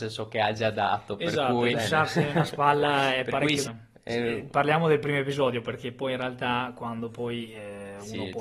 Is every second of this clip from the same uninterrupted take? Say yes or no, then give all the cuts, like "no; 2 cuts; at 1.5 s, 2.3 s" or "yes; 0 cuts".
no; 2 cuts; at 1.7 s, 3.6 s